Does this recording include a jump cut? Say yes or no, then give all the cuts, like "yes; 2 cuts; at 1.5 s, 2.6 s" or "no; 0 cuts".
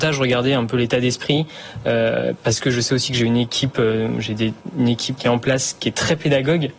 yes; 1 cut; at 5.2 s